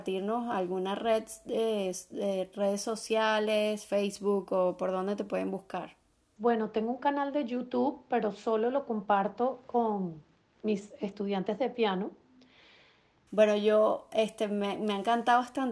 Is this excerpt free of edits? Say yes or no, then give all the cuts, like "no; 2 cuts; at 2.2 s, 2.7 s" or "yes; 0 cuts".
no; 2 cuts; at 6.4 s, 13.3 s